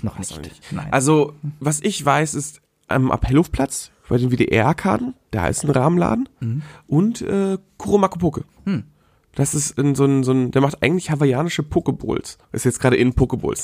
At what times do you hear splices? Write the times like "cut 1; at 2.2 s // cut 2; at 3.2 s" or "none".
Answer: cut 1; at 12.4 s